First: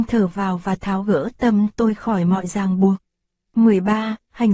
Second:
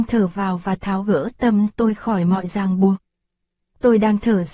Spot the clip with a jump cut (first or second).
first